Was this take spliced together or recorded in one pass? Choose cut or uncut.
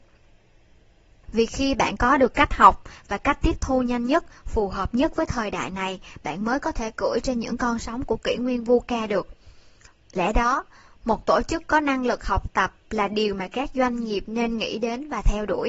cut